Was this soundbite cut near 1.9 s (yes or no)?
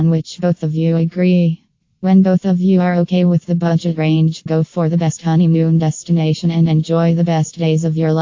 no